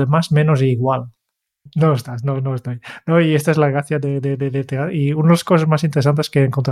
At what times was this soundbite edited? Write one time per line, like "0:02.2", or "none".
0:01.7